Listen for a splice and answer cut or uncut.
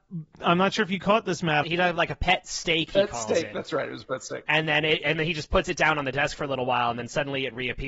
cut